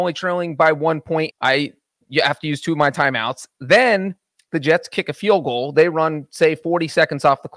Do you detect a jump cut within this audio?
yes; 1 cut; at 1.3 s

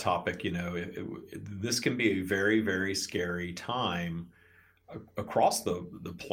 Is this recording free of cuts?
yes; 0 cuts

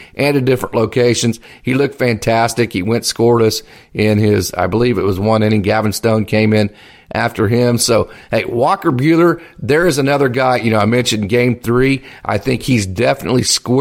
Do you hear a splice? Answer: no; 0 cuts

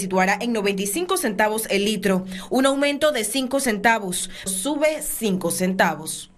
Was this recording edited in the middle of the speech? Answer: yes; 1 cut; at 4.5 s

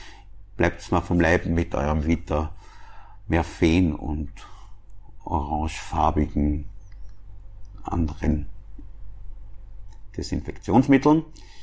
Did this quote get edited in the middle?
no; 0 cuts

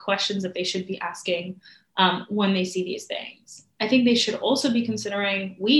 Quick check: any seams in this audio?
no; 0 cuts

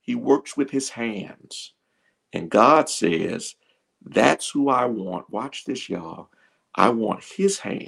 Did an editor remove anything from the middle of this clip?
no; 0 cuts

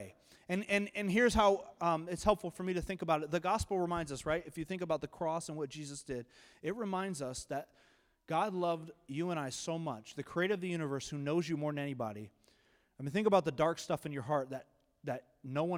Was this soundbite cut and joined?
no; 0 cuts

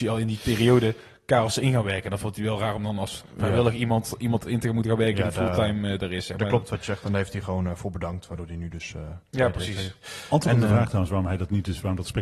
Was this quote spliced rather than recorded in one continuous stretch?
no; 0 cuts

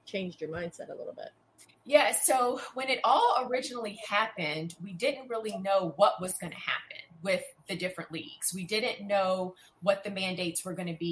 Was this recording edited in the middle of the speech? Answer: no; 0 cuts

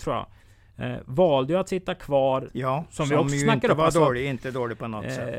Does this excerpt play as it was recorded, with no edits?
no; 1 cut; at 2.5 s

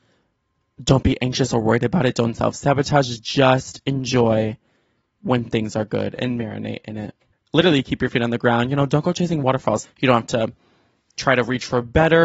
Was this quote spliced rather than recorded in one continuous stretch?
yes; 2 cuts; at 7.3 s, 9.8 s

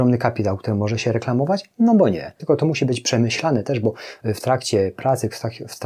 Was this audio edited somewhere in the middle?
yes; 1 cut; at 2.4 s

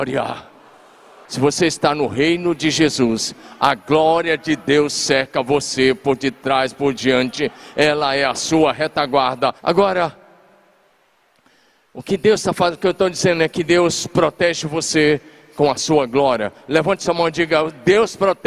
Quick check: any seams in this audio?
yes; 2 cuts; at 1.2 s, 9.6 s

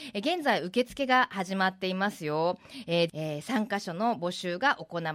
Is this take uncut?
no; 1 cut; at 3.1 s

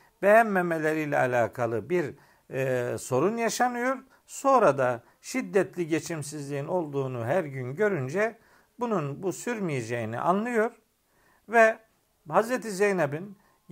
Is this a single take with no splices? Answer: no; 1 cut; at 4.1 s

